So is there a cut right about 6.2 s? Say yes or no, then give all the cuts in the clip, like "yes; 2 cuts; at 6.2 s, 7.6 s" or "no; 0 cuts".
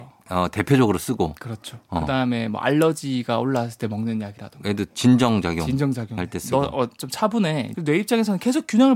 yes; 2 cuts; at 6.2 s, 7.7 s